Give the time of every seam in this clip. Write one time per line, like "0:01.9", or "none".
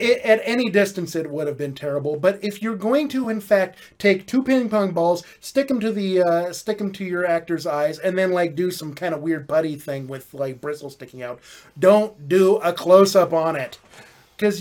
none